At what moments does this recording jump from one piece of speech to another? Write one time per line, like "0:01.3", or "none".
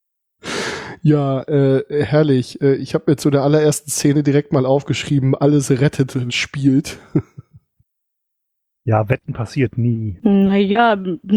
0:06.3
0:10.2